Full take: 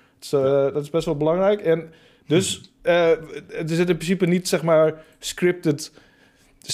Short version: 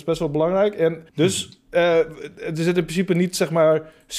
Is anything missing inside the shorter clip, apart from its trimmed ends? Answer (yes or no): yes